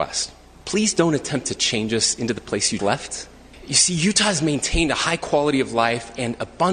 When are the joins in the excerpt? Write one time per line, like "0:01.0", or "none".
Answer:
0:02.8